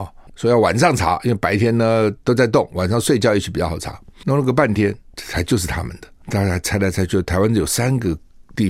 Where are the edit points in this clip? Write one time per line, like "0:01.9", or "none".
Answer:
none